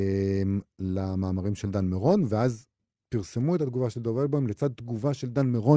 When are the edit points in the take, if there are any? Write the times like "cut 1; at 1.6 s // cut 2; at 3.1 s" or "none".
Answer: none